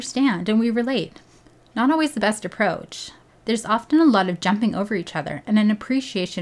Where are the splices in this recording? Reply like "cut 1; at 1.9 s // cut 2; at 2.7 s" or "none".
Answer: cut 1; at 3.3 s